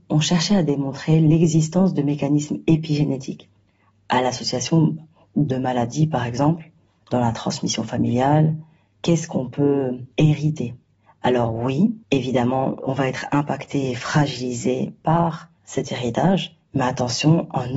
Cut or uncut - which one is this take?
cut